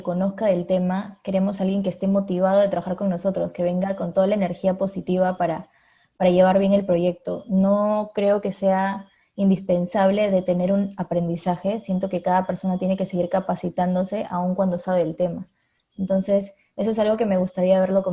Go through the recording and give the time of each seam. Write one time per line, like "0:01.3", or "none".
none